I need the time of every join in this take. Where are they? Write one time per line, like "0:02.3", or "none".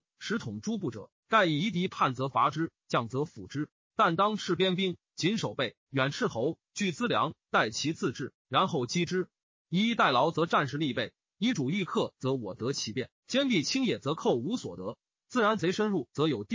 0:03.7